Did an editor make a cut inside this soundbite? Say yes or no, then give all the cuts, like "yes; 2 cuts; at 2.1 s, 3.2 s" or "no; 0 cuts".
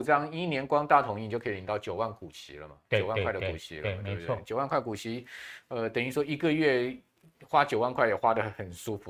no; 0 cuts